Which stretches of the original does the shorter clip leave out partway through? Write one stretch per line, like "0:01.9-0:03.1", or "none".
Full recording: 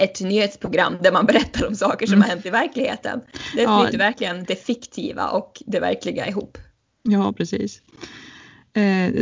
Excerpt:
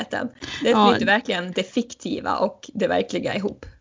none

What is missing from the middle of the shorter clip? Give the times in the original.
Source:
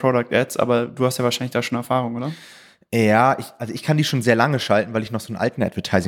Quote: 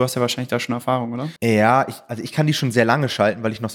0:02.4-0:02.9

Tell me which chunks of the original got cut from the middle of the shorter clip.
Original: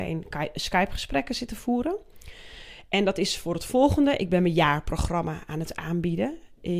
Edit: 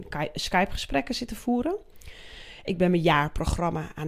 0:02.9-0:04.2

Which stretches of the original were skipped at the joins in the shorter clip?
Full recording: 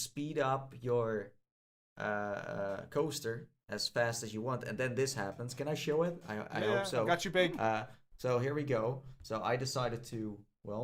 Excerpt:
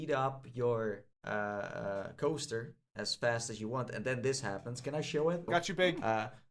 0:01.4-0:01.9
0:06.2-0:07.0

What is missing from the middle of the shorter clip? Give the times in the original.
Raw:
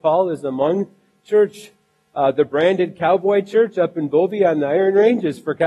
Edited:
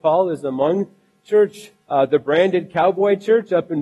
0:01.8-0:02.1

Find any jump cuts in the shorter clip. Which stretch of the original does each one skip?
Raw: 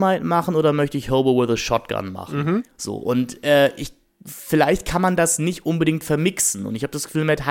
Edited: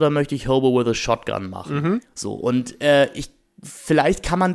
none

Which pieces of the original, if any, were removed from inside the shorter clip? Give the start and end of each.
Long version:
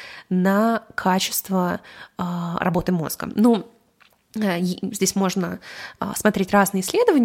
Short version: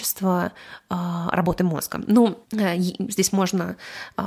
0:03.7-0:04.3

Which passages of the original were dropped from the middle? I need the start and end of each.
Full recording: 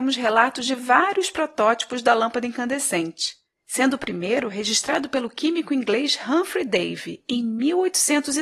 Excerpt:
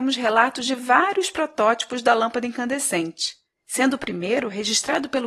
none

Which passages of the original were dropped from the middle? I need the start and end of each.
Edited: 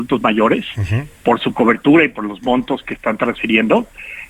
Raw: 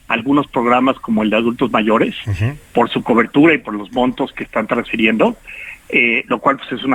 none

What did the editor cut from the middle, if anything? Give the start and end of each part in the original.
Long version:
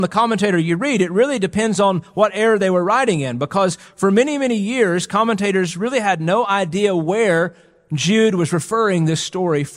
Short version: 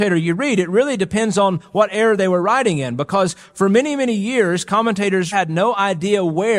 0:05.7-0:06.0

